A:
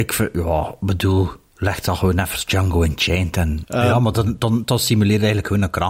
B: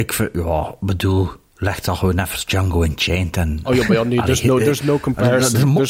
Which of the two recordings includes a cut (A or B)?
A